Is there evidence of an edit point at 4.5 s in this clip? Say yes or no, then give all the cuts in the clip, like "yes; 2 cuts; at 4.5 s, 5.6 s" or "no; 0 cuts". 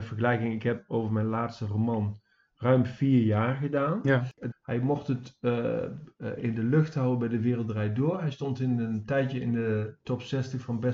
yes; 1 cut; at 4.5 s